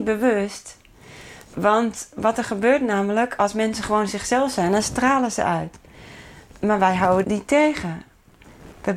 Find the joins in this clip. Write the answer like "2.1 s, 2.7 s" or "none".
7.2 s